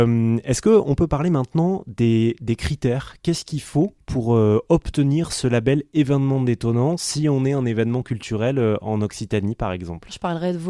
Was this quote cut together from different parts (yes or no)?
no